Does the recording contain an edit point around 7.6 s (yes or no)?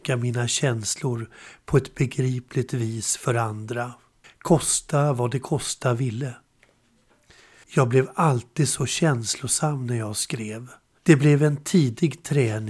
yes